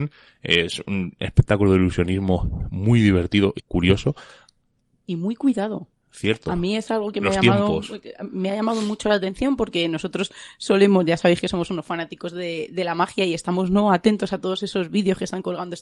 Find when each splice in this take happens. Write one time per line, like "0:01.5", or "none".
0:03.6